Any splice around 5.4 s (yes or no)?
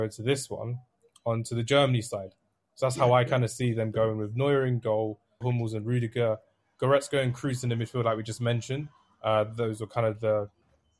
yes